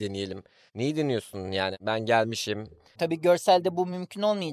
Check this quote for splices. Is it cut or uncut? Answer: cut